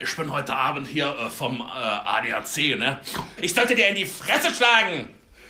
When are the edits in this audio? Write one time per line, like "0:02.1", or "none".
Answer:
0:03.4